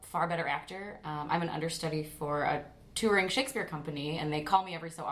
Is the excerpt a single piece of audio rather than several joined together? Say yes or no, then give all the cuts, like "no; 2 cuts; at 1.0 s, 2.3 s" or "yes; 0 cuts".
yes; 0 cuts